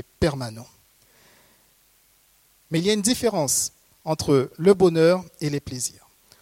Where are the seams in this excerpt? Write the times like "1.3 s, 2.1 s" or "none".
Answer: 2.7 s